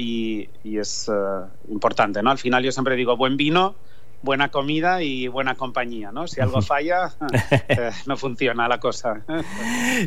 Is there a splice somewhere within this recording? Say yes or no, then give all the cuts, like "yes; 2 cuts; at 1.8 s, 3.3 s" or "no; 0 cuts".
no; 0 cuts